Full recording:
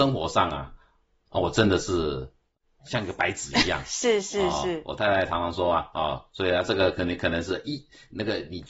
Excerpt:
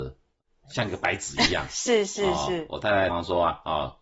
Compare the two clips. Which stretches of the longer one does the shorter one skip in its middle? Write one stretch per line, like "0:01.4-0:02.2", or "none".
0:05.3-0:05.4